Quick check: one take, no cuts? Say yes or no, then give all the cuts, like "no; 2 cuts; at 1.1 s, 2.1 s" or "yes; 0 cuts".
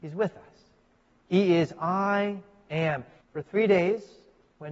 no; 2 cuts; at 1.1 s, 3.2 s